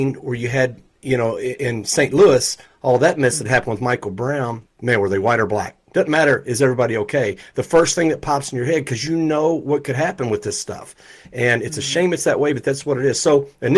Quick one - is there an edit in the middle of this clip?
yes; 2 cuts; at 4.6 s, 5.9 s

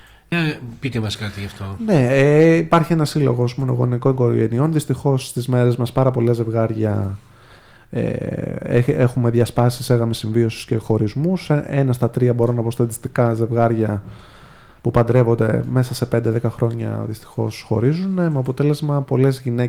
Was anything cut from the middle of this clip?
no; 0 cuts

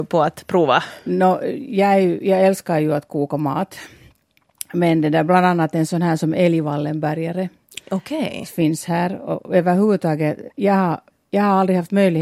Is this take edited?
no; 0 cuts

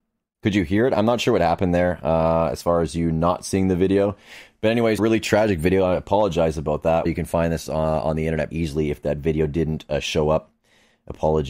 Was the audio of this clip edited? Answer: yes; 3 cuts; at 5.0 s, 7.1 s, 8.5 s

